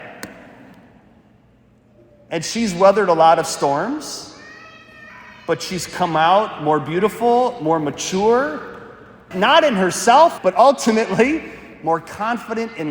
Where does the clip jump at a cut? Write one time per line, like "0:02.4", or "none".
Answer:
0:09.3
0:10.4